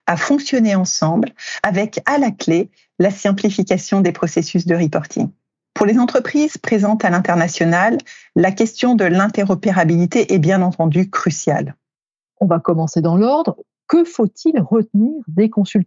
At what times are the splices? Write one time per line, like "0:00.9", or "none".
none